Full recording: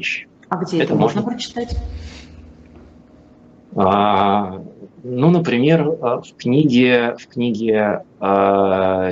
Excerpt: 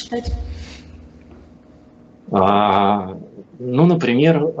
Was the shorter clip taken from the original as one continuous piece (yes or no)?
yes